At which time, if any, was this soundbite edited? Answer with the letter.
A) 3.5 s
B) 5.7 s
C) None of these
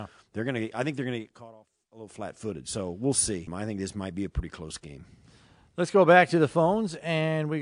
A